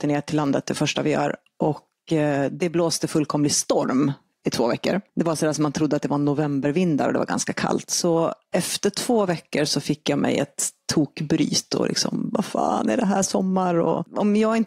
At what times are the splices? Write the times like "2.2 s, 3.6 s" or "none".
none